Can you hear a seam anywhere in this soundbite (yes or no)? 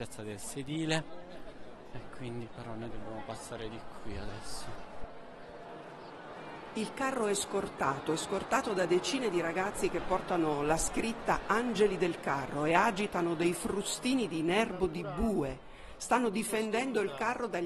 no